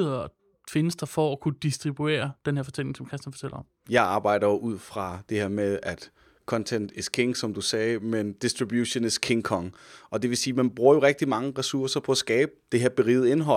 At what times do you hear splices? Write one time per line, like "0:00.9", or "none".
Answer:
none